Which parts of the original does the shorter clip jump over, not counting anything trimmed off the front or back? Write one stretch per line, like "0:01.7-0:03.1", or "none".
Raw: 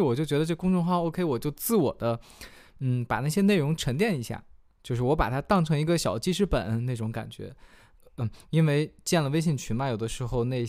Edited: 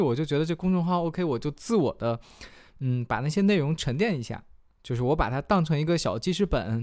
none